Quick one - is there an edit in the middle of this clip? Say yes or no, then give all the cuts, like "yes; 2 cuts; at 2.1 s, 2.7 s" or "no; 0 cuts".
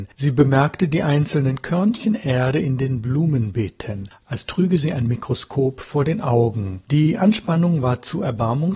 yes; 1 cut; at 6.8 s